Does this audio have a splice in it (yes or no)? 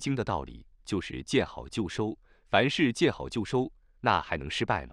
no